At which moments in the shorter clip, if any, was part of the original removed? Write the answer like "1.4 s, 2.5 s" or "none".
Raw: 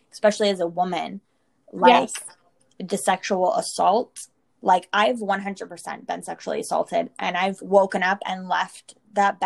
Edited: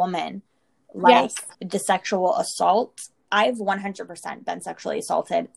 1.5 s, 3.3 s